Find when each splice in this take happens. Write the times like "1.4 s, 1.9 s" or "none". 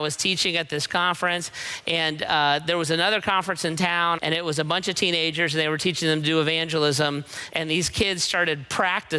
4.2 s, 7.5 s